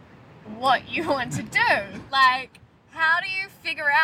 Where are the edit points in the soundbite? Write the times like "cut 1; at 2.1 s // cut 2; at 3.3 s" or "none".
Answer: cut 1; at 2.1 s